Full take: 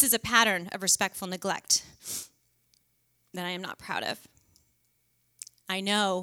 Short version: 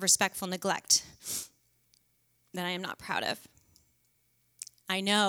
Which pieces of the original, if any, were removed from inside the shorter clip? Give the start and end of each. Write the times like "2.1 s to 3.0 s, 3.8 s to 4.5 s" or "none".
none